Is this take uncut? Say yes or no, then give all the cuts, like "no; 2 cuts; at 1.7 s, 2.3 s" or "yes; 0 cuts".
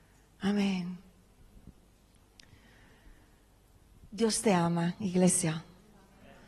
yes; 0 cuts